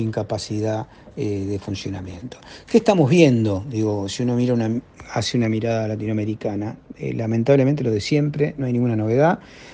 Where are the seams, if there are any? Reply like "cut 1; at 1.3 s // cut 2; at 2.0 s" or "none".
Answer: none